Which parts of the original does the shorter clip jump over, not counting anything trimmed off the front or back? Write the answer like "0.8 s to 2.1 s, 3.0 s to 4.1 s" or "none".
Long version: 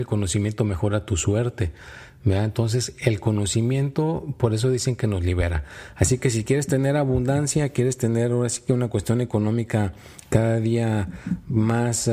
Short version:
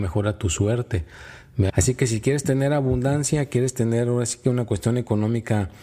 2.4 s to 5.9 s